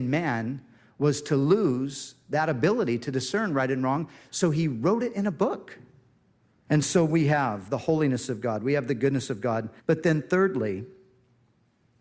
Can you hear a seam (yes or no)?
yes